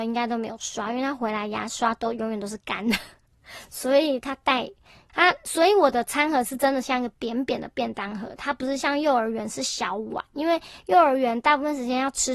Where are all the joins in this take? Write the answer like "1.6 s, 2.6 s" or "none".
5.1 s

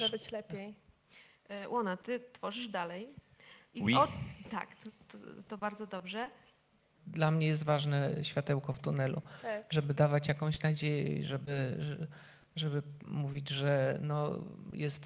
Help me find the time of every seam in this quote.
7.0 s

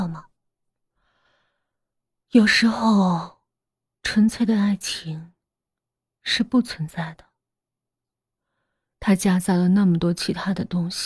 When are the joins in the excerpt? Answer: none

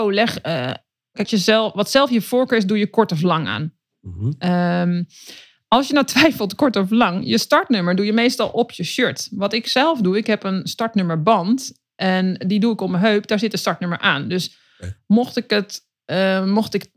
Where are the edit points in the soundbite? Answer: 1.2 s

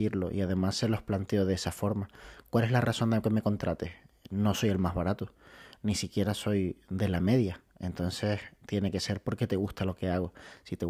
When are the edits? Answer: none

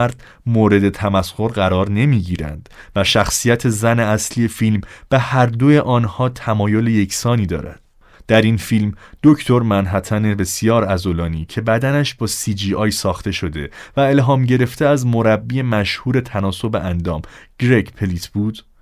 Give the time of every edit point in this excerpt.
8.1 s

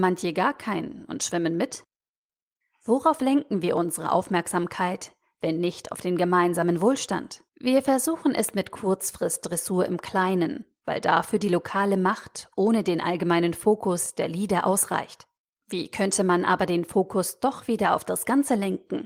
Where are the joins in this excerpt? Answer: 7.5 s, 15.6 s

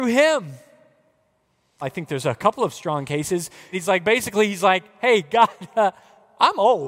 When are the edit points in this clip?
1.8 s, 3.7 s

